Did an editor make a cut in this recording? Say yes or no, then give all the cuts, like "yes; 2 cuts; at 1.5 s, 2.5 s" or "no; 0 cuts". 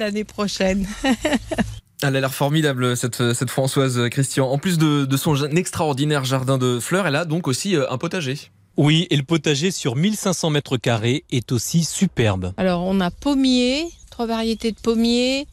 no; 0 cuts